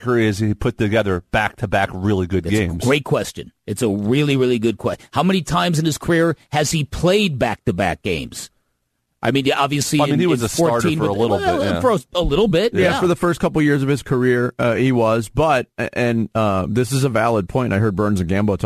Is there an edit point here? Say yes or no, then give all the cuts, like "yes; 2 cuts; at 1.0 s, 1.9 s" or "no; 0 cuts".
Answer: no; 0 cuts